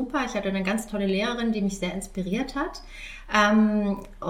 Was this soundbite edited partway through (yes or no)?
no